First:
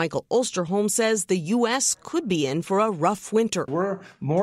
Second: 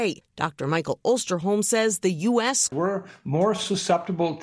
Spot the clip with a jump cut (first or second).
second